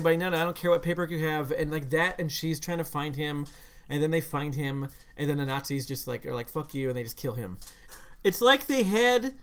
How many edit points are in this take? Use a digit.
1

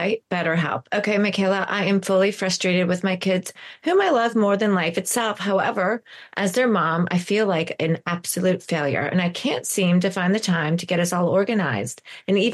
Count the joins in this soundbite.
0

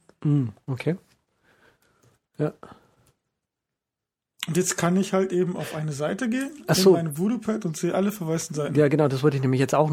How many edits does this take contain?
0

